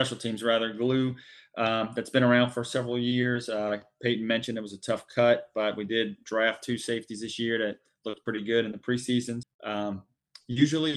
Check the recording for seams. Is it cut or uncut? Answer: cut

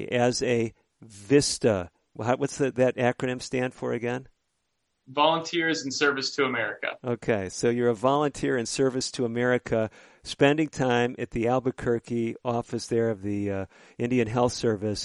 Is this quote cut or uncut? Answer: uncut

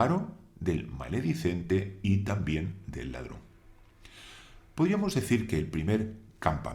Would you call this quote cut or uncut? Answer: uncut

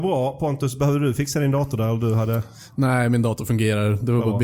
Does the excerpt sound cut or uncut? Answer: uncut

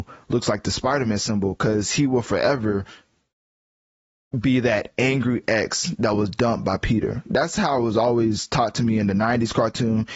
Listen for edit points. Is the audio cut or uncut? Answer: uncut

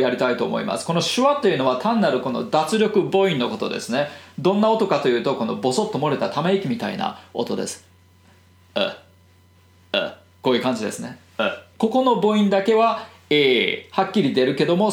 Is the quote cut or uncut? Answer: cut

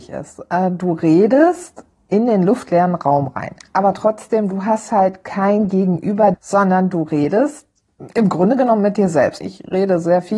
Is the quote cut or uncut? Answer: cut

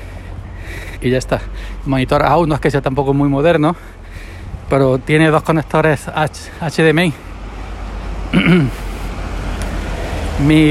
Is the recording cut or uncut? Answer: cut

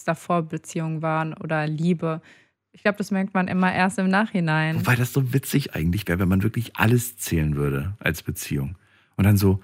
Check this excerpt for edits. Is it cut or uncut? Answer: uncut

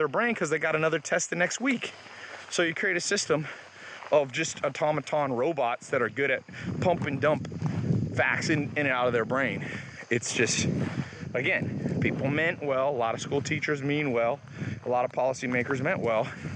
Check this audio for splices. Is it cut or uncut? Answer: uncut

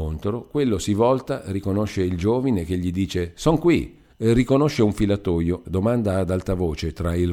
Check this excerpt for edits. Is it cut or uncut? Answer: cut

